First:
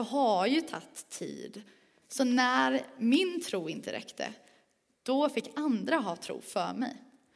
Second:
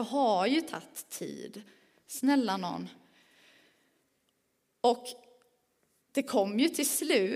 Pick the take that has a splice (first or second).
first